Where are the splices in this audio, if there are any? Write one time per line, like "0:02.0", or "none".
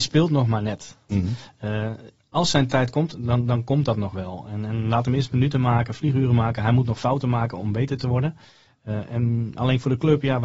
0:01.1